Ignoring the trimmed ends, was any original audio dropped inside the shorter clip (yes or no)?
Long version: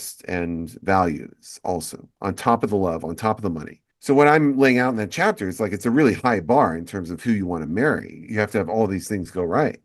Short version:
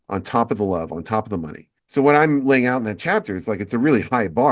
no